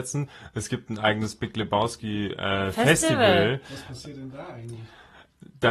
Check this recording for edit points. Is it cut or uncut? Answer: uncut